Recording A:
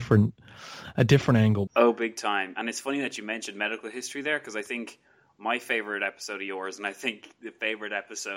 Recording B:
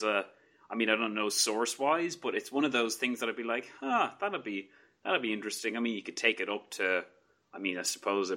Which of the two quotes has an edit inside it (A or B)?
A